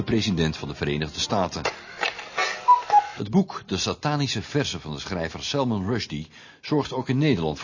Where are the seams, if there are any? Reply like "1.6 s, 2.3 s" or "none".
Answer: 3.1 s